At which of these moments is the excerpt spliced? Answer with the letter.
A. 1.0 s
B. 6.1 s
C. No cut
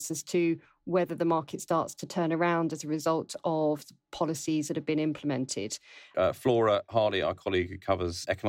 B